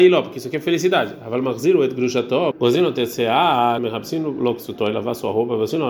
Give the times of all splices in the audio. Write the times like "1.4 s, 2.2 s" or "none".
2.5 s, 3.8 s

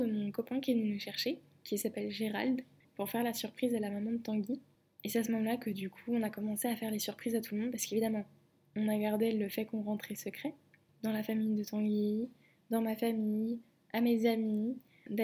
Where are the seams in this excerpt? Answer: none

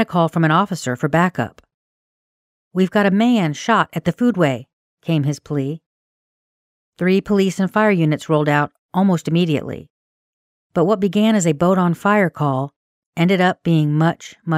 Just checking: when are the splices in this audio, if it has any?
none

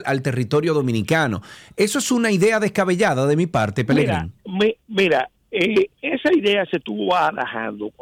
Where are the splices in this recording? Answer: none

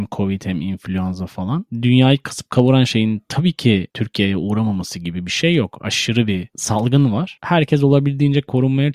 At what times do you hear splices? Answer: none

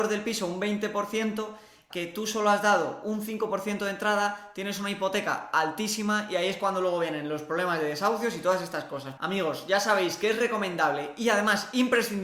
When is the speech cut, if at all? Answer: 1.9 s, 9.2 s

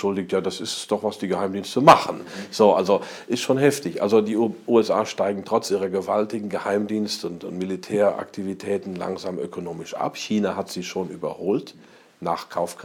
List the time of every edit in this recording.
none

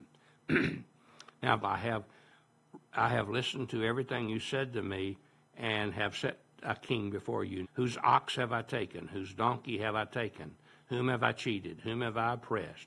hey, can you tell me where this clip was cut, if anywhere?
1.6 s, 7.6 s

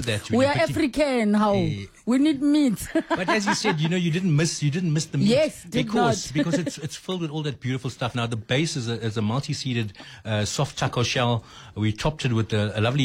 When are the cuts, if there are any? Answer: none

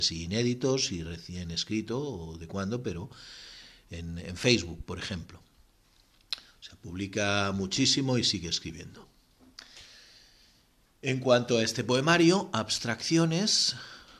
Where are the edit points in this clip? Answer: none

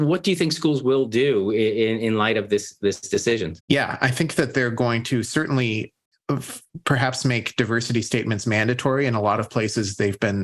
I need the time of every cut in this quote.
3.6 s

